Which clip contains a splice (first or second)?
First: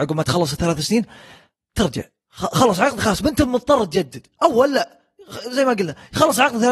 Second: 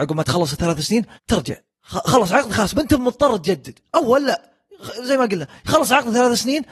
second